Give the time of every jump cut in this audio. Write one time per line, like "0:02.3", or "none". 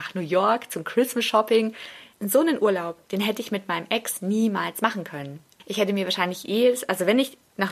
0:02.1